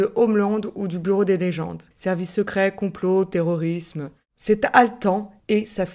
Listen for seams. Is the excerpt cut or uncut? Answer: cut